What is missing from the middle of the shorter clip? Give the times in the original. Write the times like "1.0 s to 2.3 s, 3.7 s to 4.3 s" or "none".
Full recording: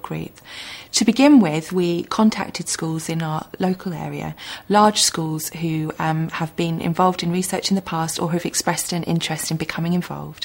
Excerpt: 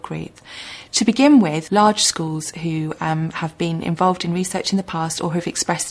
1.7 s to 4.7 s